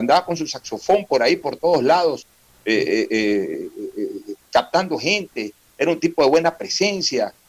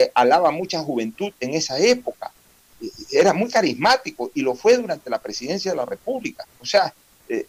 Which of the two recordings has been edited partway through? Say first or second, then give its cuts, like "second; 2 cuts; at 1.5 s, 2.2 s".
second; 1 cut; at 6.6 s